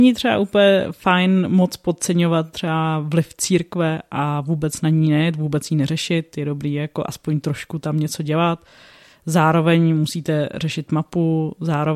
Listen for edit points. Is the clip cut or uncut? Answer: uncut